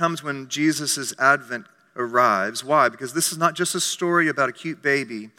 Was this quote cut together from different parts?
no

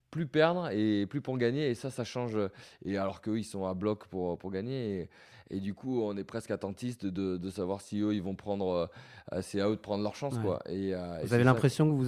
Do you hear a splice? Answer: yes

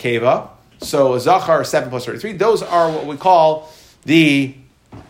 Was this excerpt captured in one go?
yes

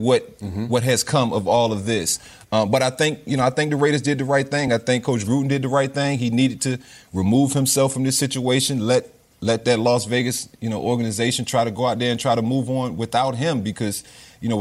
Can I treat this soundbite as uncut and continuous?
yes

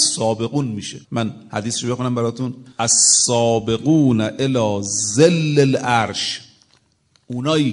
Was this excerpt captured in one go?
no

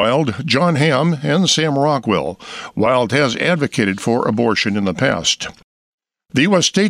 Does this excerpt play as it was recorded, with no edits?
yes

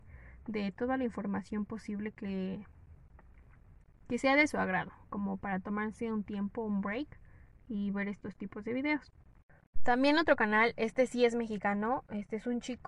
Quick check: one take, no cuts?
yes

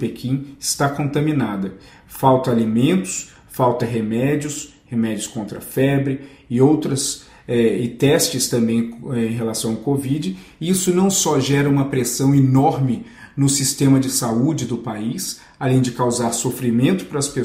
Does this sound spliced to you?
no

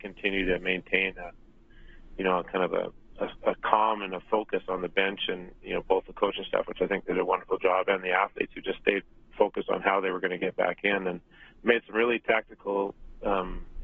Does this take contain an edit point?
no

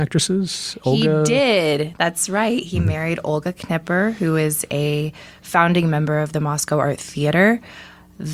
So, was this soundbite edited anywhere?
no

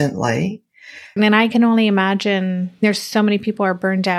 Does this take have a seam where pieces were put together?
yes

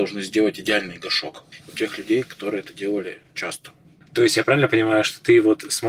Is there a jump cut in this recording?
yes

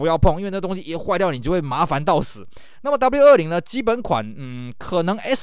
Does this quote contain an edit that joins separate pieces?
no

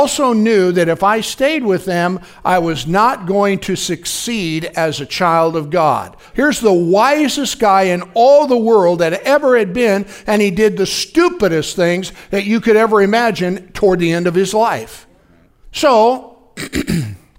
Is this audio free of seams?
no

